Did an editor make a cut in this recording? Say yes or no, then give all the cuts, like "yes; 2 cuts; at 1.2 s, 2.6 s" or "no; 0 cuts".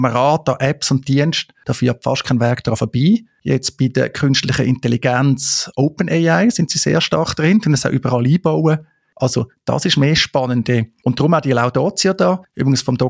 no; 0 cuts